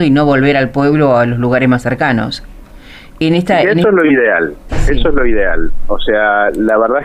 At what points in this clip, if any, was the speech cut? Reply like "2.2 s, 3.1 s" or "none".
none